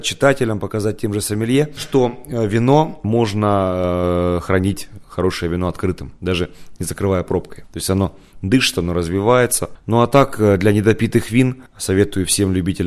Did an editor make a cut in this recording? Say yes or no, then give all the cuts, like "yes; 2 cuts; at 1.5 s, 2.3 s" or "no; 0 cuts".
no; 0 cuts